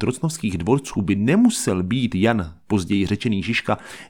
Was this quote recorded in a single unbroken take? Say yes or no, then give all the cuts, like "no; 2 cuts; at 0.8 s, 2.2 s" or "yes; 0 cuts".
yes; 0 cuts